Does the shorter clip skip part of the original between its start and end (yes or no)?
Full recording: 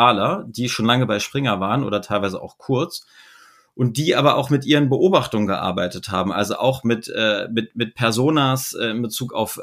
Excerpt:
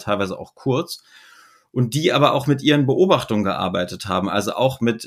no